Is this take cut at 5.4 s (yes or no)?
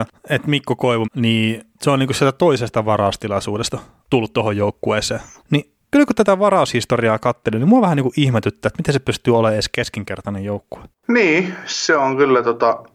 yes